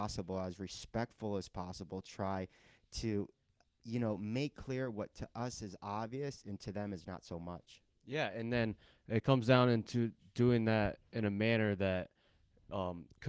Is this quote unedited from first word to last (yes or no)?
yes